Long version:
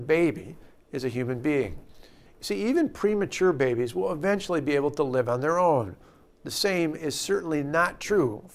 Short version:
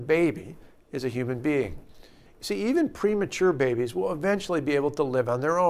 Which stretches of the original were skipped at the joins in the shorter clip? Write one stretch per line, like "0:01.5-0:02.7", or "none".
none